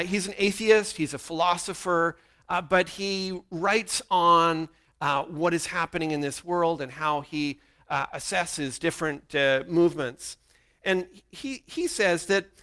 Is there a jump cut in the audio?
no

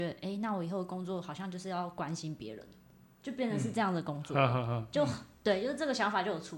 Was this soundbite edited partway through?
no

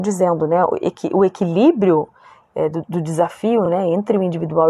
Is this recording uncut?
yes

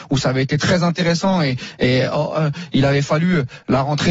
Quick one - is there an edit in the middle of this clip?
no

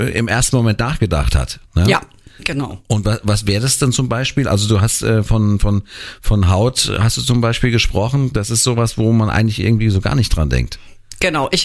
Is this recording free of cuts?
yes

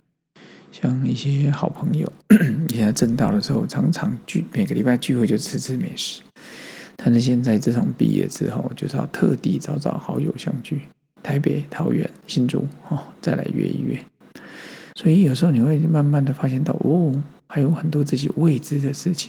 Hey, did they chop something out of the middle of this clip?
yes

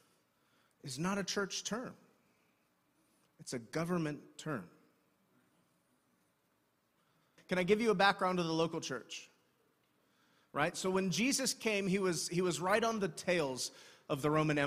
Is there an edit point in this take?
yes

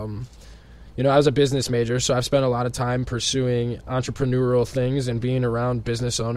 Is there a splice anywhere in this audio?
no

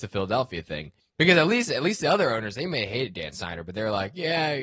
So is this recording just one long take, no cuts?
no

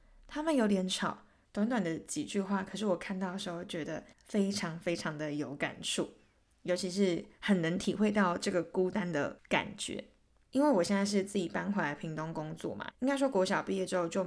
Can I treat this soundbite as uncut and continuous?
no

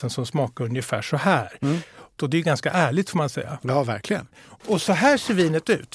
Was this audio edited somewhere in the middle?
yes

